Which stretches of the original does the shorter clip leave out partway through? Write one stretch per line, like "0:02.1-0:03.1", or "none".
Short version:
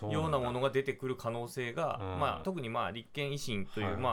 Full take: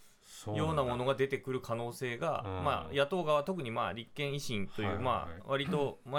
0:02.9-0:03.4